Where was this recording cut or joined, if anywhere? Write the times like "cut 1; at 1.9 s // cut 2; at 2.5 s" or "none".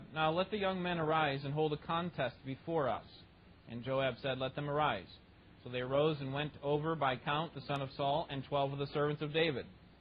cut 1; at 7.5 s